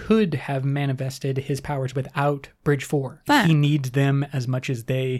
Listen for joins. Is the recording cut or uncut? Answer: cut